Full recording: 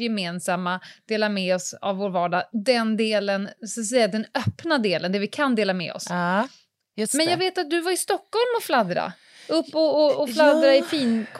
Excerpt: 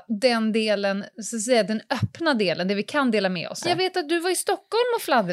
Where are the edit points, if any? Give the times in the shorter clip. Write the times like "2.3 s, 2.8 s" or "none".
3.6 s